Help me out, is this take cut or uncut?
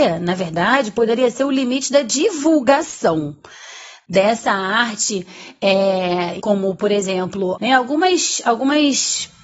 cut